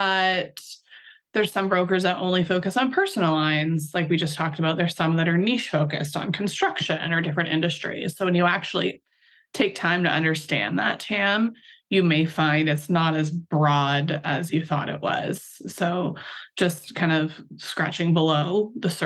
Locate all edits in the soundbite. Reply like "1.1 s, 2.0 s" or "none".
none